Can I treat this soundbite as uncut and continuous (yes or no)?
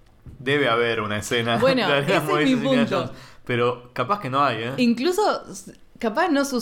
yes